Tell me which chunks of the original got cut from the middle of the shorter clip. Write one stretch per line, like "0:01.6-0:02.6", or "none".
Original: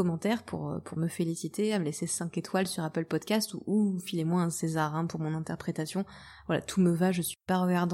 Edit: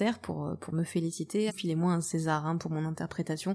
0:01.7-0:04.0